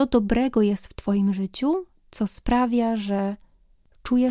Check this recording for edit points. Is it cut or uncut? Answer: uncut